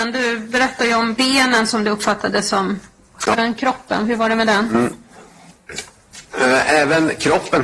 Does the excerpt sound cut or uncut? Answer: cut